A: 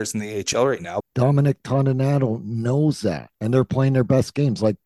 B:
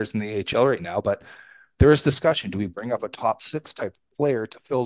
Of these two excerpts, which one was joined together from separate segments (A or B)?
A